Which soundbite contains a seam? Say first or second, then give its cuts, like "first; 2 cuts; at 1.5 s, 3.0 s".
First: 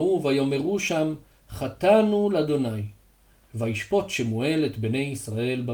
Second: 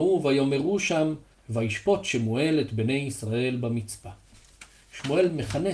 second; 1 cut; at 1.3 s